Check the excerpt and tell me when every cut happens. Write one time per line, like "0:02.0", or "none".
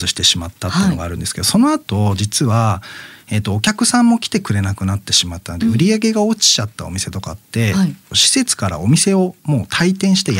none